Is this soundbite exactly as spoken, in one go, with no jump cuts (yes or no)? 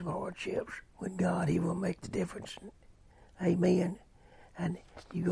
no